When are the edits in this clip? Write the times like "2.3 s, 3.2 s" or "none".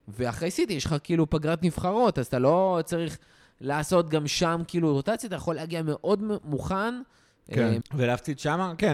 7.8 s